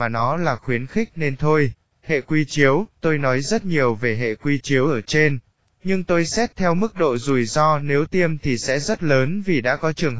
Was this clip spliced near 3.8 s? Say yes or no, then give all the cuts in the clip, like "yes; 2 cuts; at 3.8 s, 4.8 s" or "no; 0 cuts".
no; 2 cuts; at 1.9 s, 5.7 s